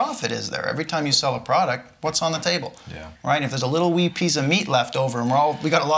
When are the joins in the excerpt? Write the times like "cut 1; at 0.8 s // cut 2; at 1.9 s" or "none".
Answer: none